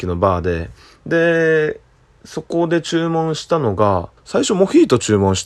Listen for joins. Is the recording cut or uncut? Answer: cut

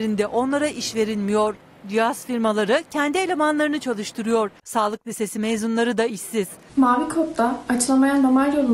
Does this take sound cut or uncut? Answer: cut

